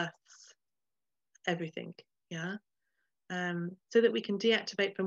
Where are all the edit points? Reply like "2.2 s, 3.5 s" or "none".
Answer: 3.8 s